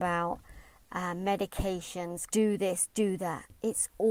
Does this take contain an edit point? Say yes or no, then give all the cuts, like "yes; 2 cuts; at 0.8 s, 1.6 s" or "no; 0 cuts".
yes; 1 cut; at 2.3 s